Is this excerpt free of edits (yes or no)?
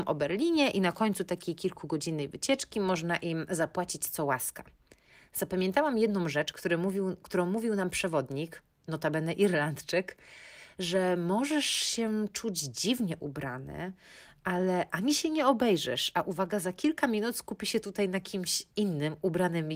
yes